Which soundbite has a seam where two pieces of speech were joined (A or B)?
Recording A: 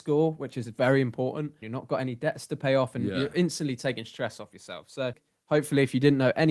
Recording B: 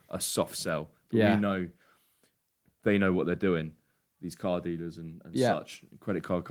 A